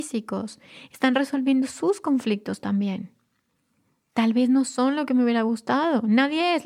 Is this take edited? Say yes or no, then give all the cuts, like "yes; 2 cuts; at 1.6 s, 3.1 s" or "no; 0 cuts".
no; 0 cuts